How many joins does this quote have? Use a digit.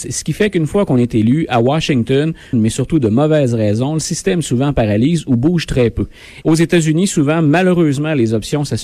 2